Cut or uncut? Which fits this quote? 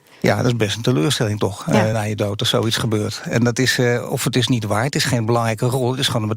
uncut